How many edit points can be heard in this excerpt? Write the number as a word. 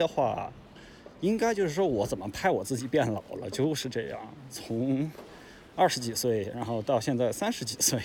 zero